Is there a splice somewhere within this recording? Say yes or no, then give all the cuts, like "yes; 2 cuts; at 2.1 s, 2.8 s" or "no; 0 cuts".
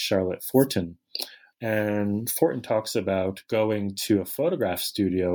yes; 1 cut; at 1.5 s